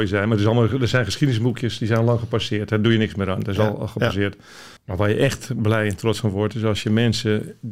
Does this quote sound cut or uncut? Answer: cut